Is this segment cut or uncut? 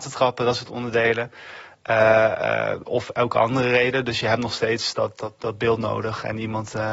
uncut